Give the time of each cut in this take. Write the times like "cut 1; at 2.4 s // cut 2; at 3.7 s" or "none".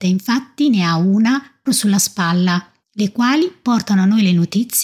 cut 1; at 1.7 s // cut 2; at 2.8 s